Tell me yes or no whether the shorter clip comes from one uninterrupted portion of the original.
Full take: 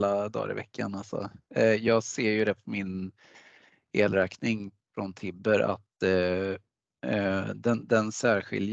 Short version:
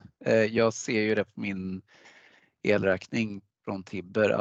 yes